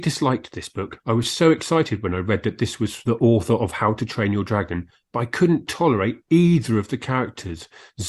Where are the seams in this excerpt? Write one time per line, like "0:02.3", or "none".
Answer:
none